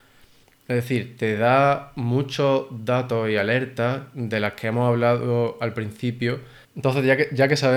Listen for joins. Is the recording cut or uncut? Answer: cut